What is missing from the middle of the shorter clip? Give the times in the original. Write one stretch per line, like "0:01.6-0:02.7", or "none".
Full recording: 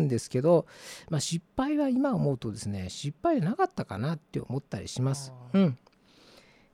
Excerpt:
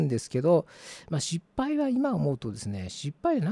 none